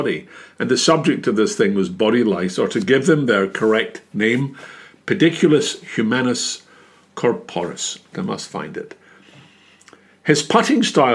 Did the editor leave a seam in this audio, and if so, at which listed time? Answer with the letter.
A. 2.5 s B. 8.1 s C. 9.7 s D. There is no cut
B